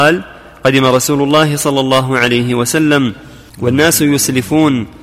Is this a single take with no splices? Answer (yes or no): no